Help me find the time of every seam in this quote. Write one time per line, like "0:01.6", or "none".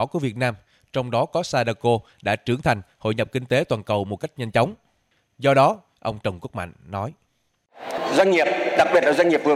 0:05.9